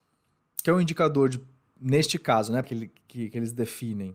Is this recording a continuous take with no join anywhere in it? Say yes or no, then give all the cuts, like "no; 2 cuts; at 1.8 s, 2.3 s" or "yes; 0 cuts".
no; 1 cut; at 2.6 s